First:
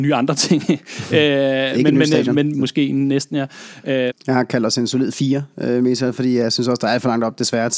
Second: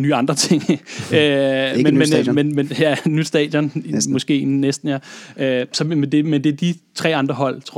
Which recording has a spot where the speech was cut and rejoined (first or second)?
first